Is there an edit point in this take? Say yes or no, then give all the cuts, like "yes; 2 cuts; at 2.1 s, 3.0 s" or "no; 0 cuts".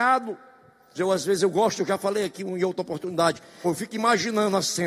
yes; 2 cuts; at 0.9 s, 3.6 s